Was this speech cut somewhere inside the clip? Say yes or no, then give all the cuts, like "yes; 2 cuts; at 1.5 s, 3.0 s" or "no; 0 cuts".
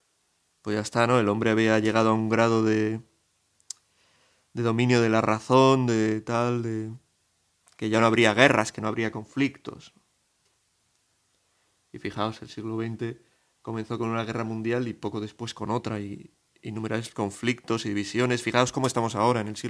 no; 0 cuts